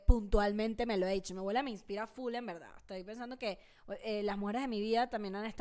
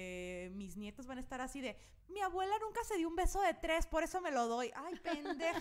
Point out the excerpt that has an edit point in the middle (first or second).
second